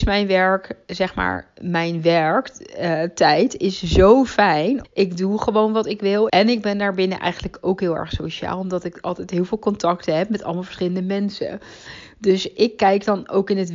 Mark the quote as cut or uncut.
cut